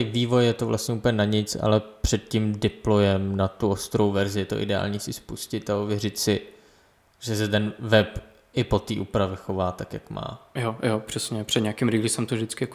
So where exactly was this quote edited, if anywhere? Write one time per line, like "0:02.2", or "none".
none